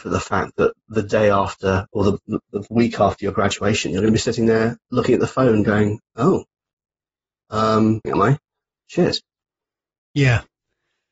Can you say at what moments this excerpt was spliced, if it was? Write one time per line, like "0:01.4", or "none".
0:08.0